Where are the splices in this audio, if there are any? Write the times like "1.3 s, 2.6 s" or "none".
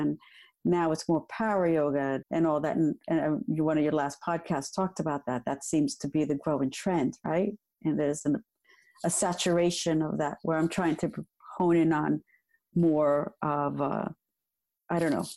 2.2 s

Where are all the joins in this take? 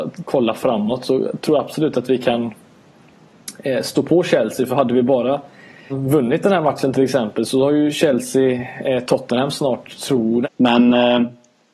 5.9 s, 10.4 s

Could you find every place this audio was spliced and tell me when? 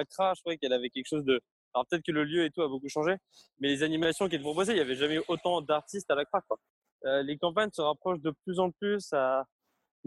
none

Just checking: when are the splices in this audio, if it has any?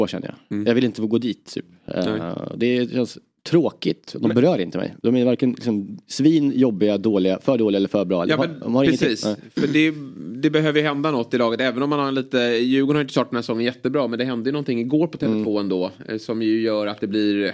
none

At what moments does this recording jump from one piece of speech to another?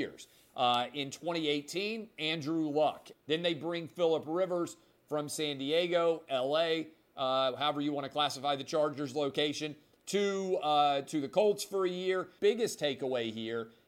3.1 s, 12.4 s

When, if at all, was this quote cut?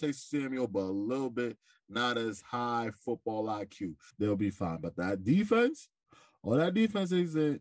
4.1 s

